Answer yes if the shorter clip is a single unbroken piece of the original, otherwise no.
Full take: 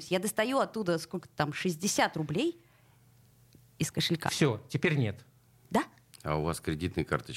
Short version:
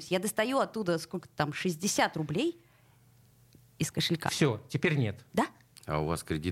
no